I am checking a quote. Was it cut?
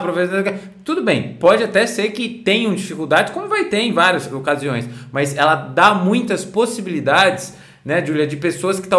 no; 0 cuts

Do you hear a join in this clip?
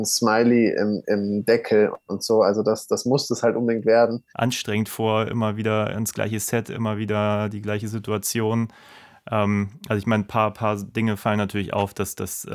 yes; 1 cut; at 4.3 s

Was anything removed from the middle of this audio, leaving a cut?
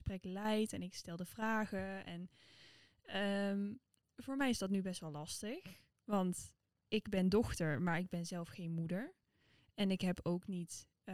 no; 0 cuts

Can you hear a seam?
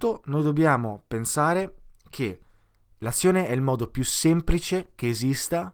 no; 0 cuts

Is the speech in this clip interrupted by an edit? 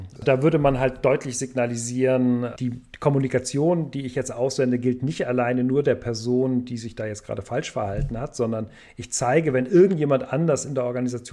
no; 0 cuts

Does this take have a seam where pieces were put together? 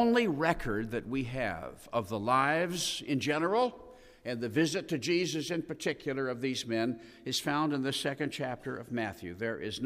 no; 0 cuts

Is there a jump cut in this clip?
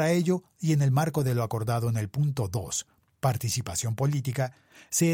no; 0 cuts

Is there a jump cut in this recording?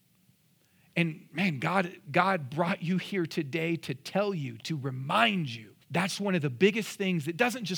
yes; 1 cut; at 5.8 s

